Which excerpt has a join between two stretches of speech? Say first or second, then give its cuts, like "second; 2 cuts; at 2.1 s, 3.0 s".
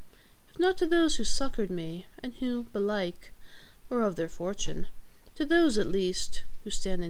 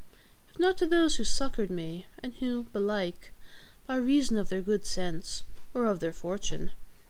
first; 2 cuts; at 3.8 s, 5.3 s